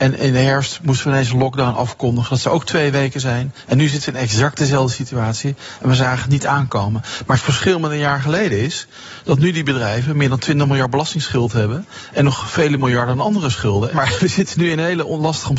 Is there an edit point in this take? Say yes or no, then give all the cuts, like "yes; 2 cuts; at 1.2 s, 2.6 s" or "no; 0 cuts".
yes; 2 cuts; at 3.7 s, 13.9 s